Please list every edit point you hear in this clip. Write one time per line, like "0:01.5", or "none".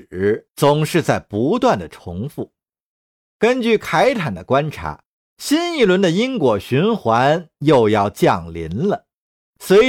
none